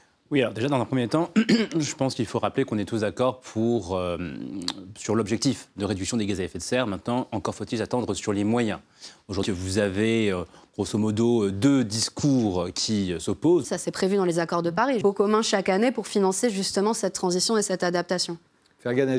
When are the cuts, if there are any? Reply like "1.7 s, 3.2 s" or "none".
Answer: 9.4 s, 13.6 s, 15.0 s